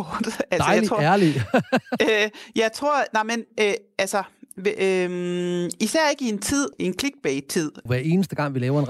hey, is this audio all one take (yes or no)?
no